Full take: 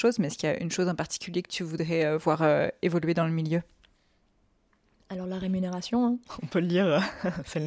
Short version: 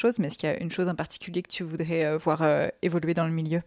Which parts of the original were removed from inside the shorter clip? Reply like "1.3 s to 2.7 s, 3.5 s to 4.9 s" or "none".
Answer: none